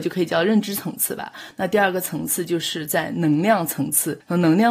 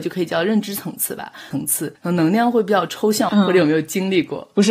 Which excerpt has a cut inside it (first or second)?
second